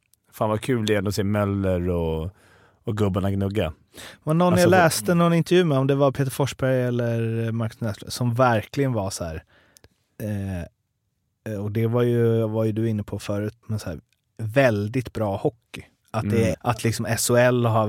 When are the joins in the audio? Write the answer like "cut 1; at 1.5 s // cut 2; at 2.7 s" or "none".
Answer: cut 1; at 13.6 s // cut 2; at 16.5 s